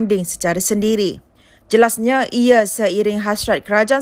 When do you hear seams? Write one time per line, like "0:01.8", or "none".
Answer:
none